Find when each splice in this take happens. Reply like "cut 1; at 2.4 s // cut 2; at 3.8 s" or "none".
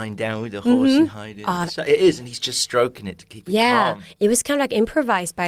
cut 1; at 1.7 s